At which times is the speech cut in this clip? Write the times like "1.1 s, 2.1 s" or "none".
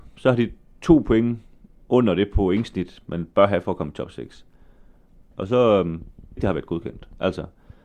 5.3 s, 6.4 s